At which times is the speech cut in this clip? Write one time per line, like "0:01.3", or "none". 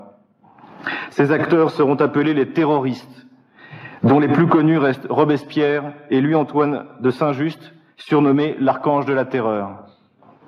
none